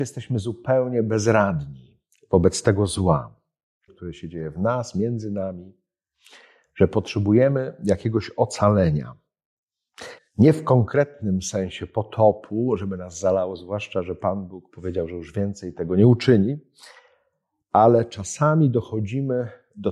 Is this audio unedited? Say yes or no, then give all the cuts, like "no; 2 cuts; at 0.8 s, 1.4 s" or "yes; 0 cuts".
no; 2 cuts; at 3.9 s, 10.2 s